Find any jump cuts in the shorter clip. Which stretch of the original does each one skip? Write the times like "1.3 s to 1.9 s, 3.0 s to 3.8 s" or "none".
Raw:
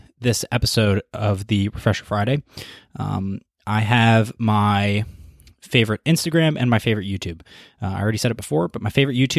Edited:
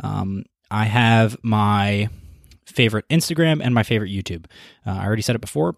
none